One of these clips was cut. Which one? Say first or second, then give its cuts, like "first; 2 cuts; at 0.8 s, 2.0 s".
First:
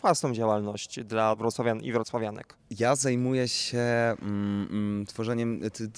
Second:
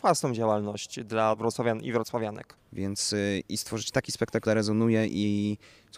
second; 2 cuts; at 2.6 s, 4.5 s